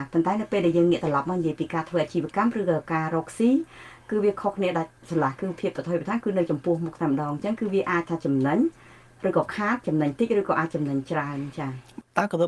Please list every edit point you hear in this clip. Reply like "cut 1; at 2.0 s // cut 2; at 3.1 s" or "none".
cut 1; at 5.0 s